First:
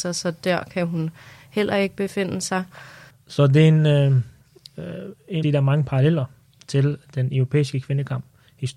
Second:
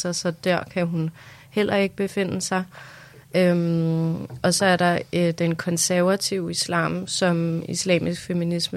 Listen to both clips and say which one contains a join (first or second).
first